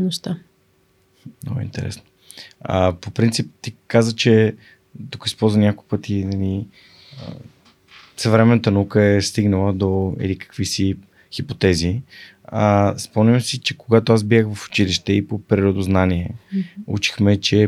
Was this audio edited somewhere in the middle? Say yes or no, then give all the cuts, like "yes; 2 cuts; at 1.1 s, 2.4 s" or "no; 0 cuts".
yes; 1 cut; at 1.3 s